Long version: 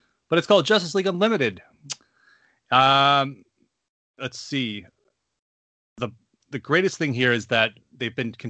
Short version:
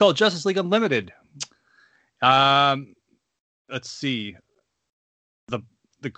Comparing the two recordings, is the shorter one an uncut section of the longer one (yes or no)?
yes